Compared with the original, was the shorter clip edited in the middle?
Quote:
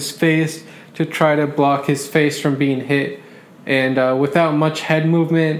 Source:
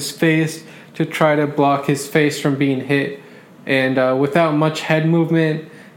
no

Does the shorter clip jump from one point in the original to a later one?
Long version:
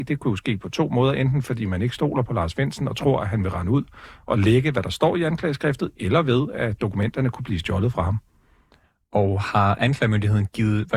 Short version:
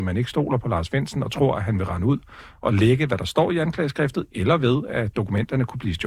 no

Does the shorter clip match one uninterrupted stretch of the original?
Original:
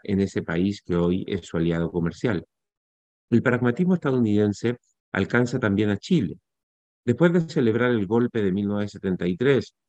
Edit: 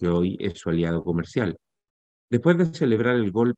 no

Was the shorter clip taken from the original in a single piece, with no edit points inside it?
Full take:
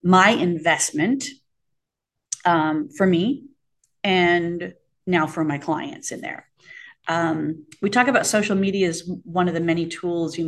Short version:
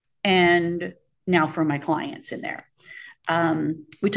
yes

